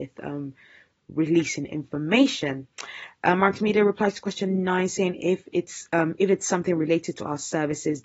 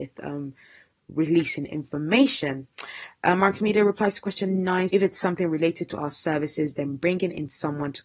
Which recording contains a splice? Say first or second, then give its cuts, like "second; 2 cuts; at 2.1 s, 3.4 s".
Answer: second; 1 cut; at 4.9 s